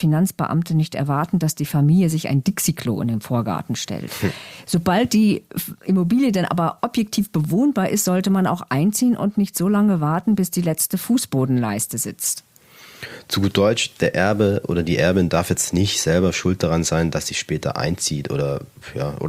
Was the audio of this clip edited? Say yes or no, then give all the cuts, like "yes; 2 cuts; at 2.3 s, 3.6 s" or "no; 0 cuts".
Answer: no; 0 cuts